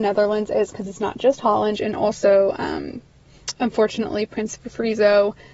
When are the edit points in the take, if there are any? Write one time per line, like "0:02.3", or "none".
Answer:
0:01.7